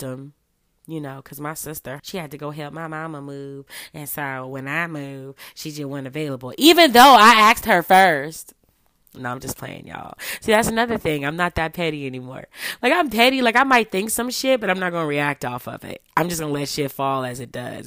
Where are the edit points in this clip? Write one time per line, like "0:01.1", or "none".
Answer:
0:02.0